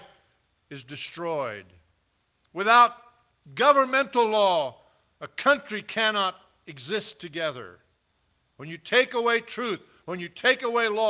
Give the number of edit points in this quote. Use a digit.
0